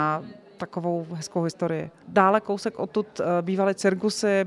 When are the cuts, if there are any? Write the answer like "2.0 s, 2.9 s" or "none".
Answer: 2.0 s